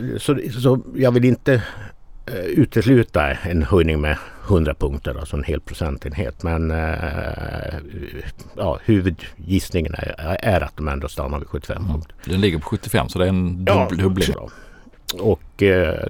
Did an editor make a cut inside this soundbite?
yes; 2 cuts; at 12.3 s, 14.3 s

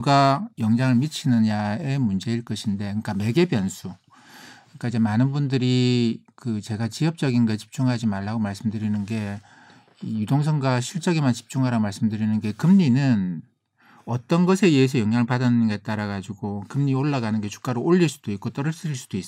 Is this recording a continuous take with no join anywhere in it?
yes; 0 cuts

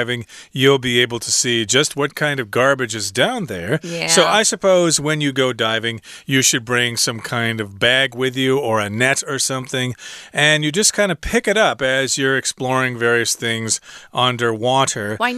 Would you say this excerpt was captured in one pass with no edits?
yes; 0 cuts

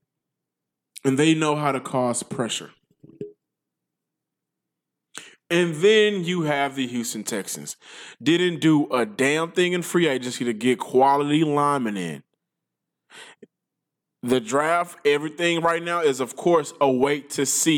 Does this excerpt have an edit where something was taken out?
no; 0 cuts

